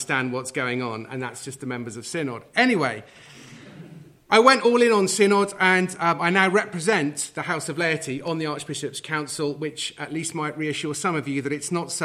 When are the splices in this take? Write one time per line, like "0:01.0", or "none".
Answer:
none